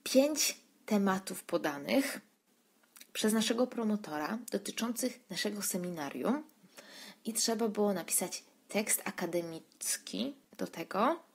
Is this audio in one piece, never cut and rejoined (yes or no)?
no